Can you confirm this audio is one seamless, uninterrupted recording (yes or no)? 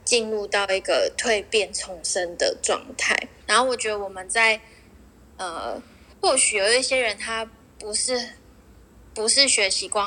no